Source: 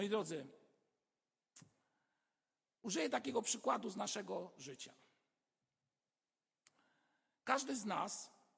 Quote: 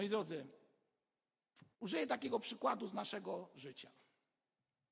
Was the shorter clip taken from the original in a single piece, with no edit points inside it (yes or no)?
no